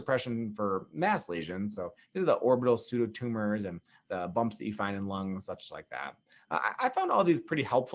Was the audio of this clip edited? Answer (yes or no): no